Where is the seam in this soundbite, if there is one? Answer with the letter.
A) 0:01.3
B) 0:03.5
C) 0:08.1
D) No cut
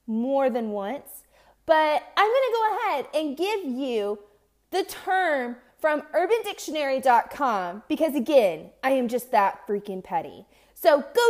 D